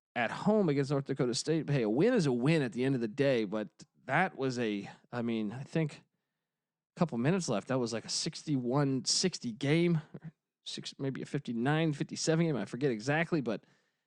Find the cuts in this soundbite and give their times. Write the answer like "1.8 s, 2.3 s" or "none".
none